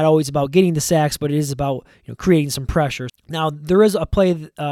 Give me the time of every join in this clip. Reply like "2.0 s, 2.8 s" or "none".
3.1 s

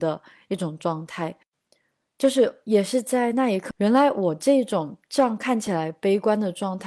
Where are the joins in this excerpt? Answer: 3.7 s

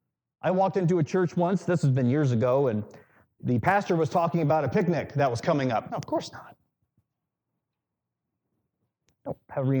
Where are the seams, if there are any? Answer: 3.4 s, 5.9 s

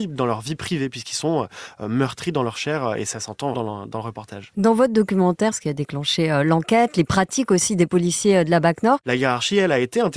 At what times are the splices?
3.5 s, 5.5 s, 9.0 s

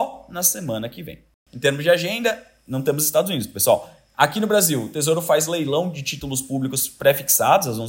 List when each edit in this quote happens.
none

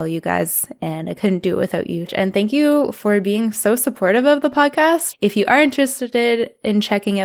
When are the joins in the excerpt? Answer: 2.1 s, 5.1 s

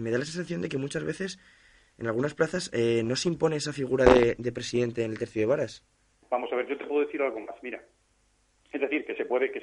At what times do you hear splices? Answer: 6.2 s

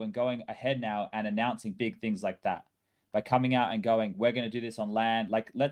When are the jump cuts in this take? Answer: none

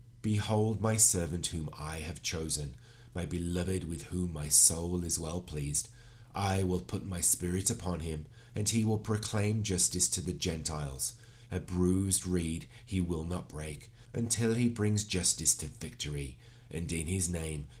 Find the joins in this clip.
11.5 s, 14.0 s

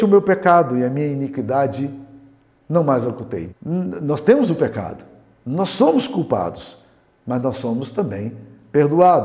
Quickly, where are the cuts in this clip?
3.5 s

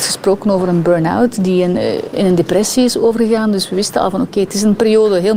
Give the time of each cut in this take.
none

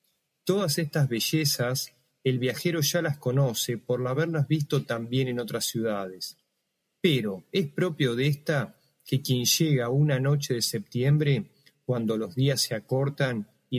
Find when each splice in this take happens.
none

